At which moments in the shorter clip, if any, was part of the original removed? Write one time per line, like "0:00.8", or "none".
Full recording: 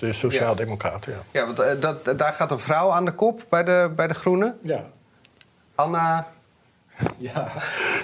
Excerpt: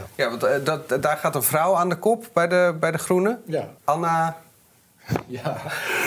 0:03.8

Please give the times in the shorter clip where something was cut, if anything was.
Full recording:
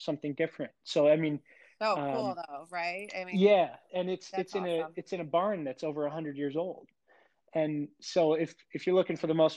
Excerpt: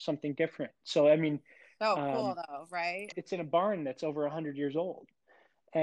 0:03.1

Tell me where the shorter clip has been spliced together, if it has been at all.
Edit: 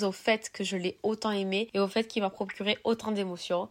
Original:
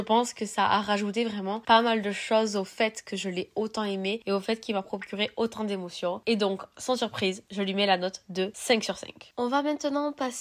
none

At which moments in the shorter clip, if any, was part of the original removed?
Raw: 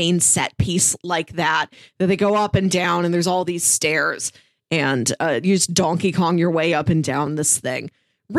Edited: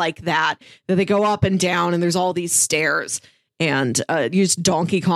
none

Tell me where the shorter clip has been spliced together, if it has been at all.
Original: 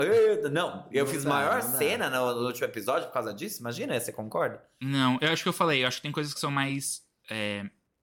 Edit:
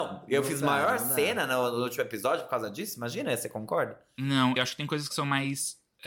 0:04.6

